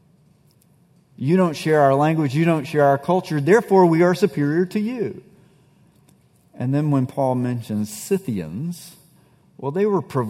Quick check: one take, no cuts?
yes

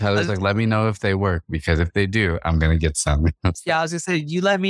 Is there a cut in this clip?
no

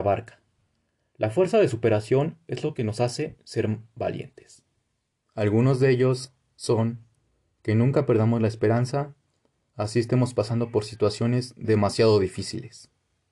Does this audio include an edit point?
yes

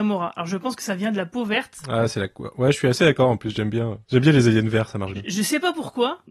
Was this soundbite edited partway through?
no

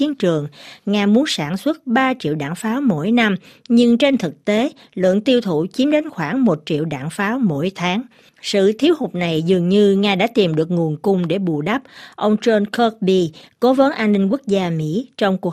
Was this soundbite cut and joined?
no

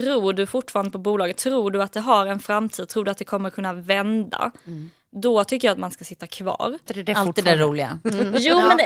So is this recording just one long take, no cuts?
no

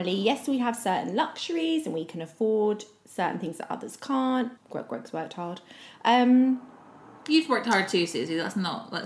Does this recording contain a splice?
yes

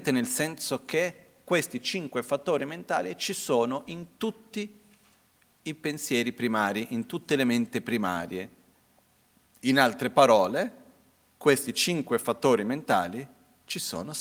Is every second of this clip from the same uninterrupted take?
yes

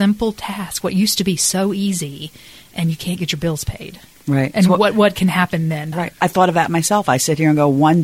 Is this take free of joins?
no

